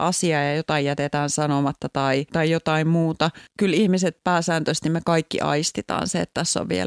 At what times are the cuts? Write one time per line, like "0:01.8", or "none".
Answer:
none